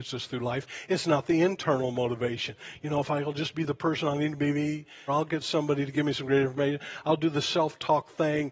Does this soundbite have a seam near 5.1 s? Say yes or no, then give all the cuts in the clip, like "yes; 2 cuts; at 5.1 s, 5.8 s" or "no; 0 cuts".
yes; 1 cut; at 5.1 s